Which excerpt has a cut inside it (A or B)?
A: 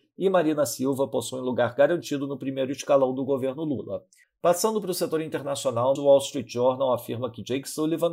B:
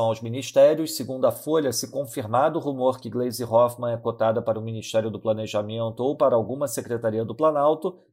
A